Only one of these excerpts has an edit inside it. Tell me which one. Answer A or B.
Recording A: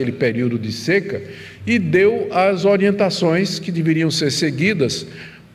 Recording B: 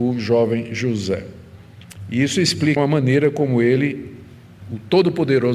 B